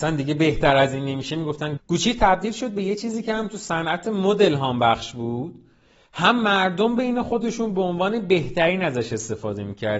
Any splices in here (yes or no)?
yes